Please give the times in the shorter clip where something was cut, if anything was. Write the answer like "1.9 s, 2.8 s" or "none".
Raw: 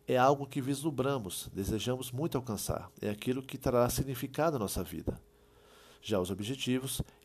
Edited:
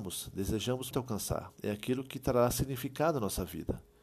0.9 s